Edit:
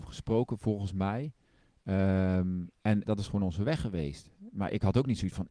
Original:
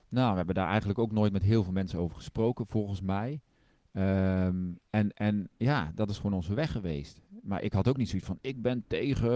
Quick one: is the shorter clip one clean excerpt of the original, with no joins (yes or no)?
no